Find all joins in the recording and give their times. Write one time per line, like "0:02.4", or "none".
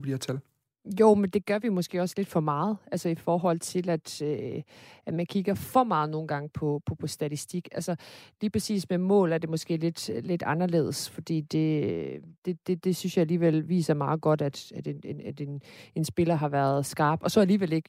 none